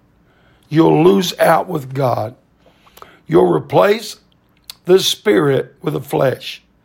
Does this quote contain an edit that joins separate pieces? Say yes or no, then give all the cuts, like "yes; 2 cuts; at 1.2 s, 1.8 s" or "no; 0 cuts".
no; 0 cuts